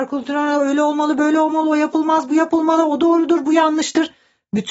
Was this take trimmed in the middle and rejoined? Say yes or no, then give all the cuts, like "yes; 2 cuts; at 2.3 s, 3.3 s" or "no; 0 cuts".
no; 0 cuts